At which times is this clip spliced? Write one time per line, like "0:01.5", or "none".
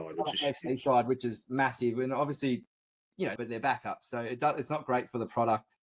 0:03.4